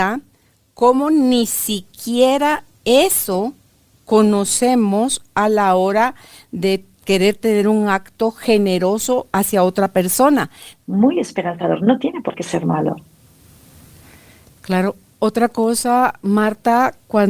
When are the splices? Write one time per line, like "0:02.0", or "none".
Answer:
0:10.8